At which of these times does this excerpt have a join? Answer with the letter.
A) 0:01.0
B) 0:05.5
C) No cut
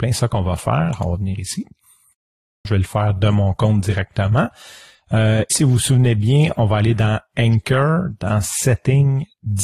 B